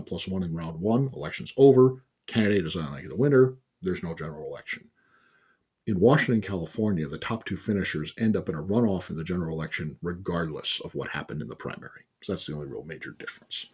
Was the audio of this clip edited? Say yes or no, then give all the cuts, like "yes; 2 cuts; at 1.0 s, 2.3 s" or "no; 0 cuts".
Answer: no; 0 cuts